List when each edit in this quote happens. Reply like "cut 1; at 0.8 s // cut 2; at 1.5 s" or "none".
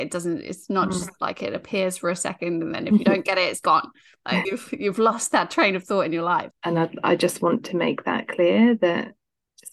cut 1; at 4.4 s // cut 2; at 6.5 s

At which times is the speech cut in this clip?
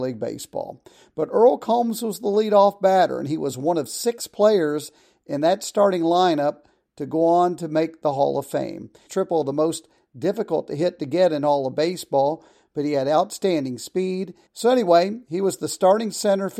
cut 1; at 9.1 s // cut 2; at 14.5 s

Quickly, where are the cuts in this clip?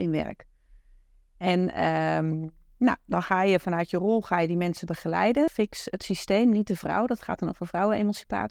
cut 1; at 5.5 s

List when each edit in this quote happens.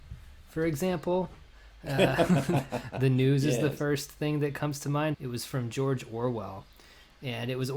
cut 1; at 5.1 s

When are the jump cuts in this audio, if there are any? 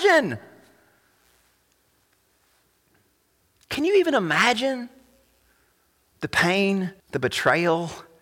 cut 1; at 7.0 s

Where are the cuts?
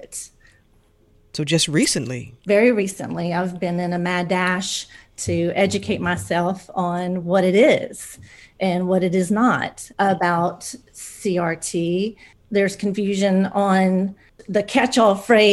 cut 1; at 2.4 s // cut 2; at 9.9 s

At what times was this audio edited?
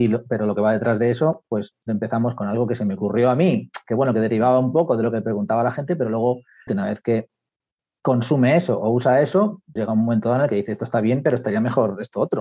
cut 1; at 6.7 s // cut 2; at 9.8 s

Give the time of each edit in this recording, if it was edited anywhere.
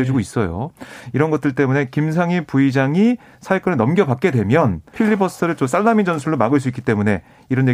cut 1; at 4.9 s

